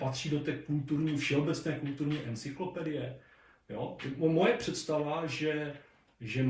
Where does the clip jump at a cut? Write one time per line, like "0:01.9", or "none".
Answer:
none